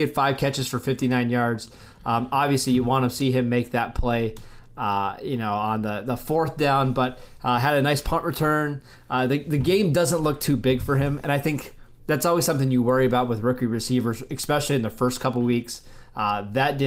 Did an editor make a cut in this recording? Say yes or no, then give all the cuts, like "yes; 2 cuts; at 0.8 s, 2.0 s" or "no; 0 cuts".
no; 0 cuts